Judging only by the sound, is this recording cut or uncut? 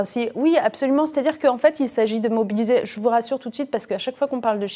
uncut